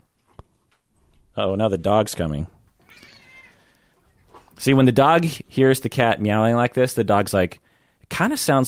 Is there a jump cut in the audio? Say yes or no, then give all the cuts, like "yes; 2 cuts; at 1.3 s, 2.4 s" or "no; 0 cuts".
no; 0 cuts